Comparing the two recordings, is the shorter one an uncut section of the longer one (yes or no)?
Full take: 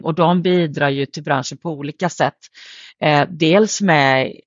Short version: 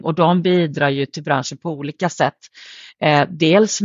yes